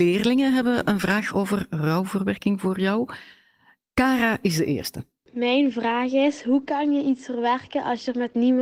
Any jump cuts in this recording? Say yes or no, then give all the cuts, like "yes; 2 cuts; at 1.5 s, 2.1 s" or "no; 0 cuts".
no; 0 cuts